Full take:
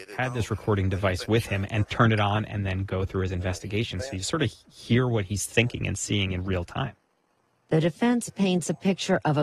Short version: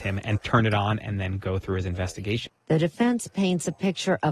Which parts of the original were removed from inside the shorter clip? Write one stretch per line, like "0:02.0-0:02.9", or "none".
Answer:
0:03.9-0:07.5